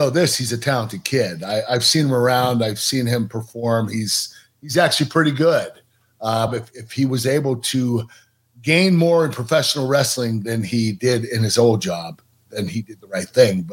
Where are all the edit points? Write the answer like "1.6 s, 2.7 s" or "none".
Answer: 6.5 s